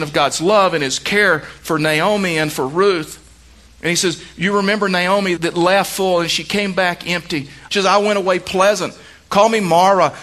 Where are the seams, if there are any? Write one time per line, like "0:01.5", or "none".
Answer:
0:05.4
0:07.7